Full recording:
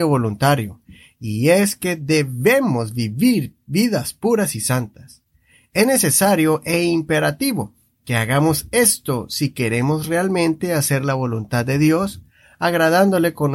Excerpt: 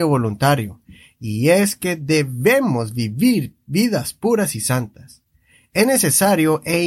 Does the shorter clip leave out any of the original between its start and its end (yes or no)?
no